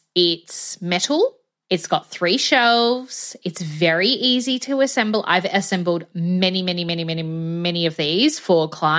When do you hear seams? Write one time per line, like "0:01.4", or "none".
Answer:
none